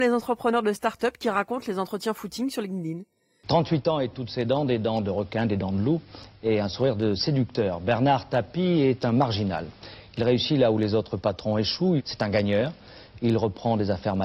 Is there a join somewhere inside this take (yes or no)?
yes